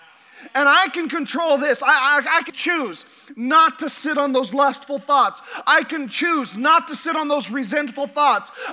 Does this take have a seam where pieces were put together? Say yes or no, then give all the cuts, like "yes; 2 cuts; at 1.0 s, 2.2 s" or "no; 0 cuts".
yes; 1 cut; at 2.5 s